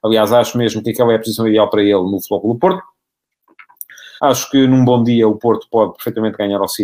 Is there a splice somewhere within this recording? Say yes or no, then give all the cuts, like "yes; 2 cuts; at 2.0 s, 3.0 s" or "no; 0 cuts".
yes; 1 cut; at 4.2 s